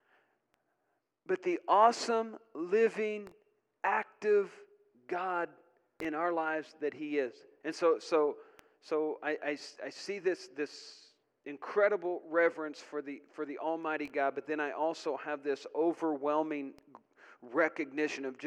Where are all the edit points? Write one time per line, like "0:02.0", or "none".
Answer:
0:07.6